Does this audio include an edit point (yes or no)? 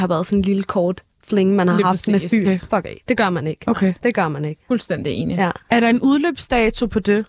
yes